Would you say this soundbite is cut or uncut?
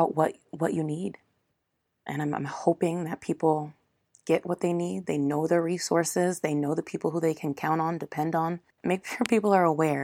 uncut